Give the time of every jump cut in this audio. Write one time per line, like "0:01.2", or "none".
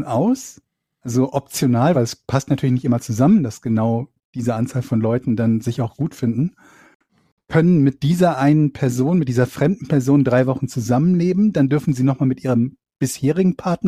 none

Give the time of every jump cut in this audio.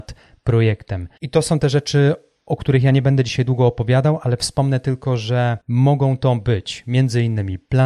0:05.6

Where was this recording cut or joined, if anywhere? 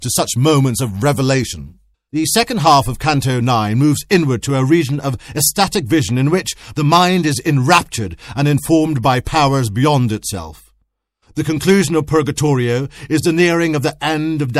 0:01.9
0:06.7

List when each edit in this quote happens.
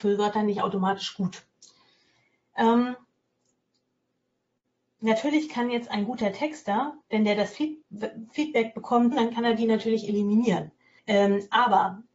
0:07.0
0:09.1
0:11.0

